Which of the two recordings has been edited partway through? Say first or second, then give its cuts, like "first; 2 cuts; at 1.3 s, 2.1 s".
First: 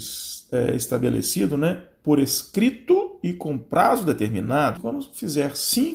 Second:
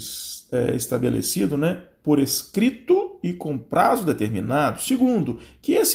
first; 1 cut; at 4.8 s